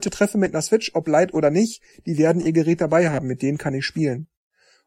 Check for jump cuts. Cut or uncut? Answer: uncut